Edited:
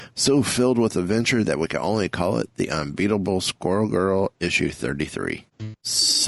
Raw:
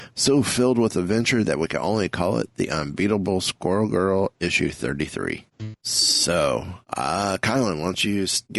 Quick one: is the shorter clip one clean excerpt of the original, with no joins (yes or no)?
yes